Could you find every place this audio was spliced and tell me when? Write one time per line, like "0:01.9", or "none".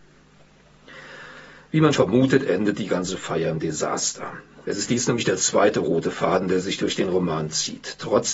0:01.9
0:04.6